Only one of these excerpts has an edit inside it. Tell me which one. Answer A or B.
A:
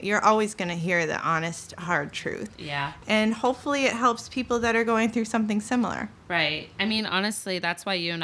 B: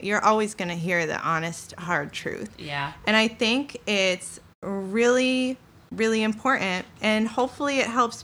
A